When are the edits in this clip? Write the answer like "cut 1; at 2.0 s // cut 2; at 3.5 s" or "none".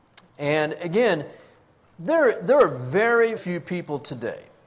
cut 1; at 3.4 s